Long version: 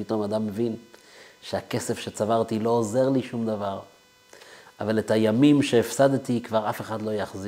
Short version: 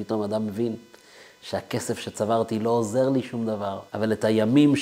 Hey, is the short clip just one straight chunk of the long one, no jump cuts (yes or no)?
no